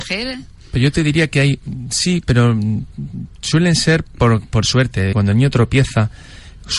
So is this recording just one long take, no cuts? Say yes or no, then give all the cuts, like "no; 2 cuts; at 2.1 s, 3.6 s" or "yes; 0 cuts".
no; 1 cut; at 5.1 s